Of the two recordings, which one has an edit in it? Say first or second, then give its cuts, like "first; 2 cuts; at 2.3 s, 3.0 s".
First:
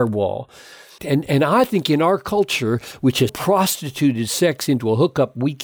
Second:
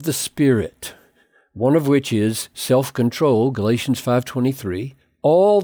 first; 2 cuts; at 1.0 s, 3.3 s